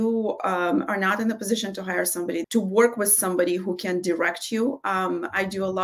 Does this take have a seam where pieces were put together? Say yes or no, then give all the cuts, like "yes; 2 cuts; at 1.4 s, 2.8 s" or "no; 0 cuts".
yes; 1 cut; at 2.4 s